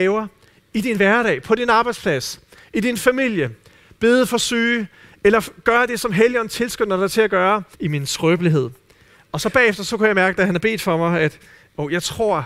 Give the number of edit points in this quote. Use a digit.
1